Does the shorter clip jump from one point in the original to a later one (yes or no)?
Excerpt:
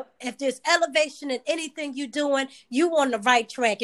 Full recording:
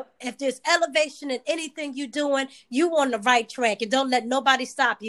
no